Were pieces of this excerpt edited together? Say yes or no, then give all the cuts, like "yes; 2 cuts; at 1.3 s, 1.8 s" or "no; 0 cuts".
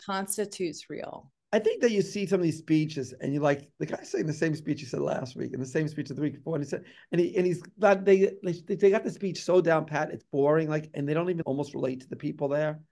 yes; 1 cut; at 11.4 s